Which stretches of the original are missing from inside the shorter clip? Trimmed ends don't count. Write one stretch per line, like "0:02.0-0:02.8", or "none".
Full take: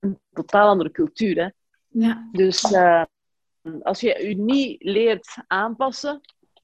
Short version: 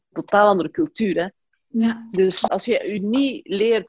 0:02.7-0:03.8